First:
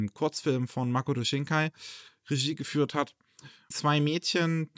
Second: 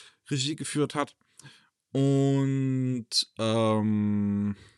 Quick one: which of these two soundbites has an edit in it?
first; 1 cut; at 3.7 s

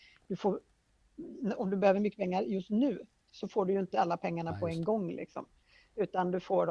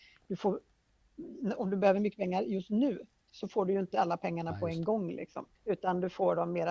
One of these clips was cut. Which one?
second; 1 cut; at 5.5 s

